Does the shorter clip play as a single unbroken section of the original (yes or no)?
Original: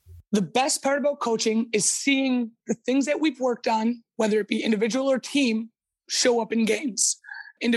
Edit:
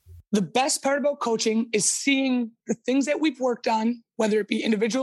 yes